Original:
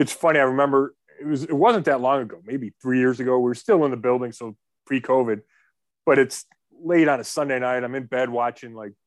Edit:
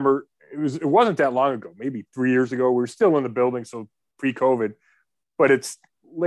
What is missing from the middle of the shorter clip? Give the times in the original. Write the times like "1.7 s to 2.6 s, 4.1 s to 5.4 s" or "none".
none